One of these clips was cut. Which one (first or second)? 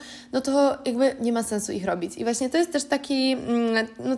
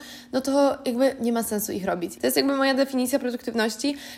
second